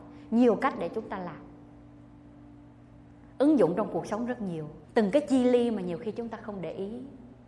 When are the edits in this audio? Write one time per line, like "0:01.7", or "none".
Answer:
0:04.8